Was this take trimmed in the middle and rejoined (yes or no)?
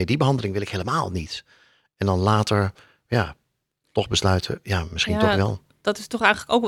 no